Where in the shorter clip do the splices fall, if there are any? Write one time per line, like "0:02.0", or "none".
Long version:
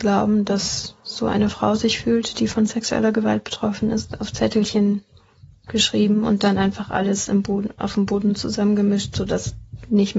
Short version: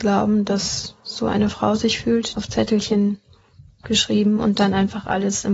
0:02.3